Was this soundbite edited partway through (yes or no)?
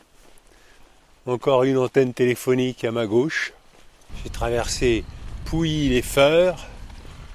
no